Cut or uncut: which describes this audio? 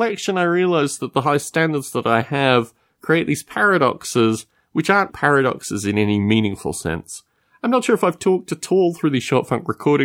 cut